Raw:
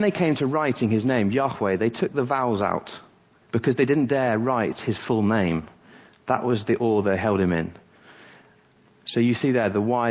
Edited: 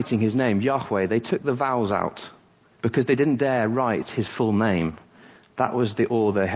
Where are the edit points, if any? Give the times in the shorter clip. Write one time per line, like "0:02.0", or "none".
none